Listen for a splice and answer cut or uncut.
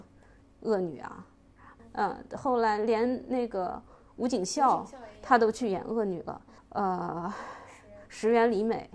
cut